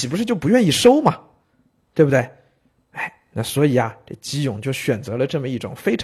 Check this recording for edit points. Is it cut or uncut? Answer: uncut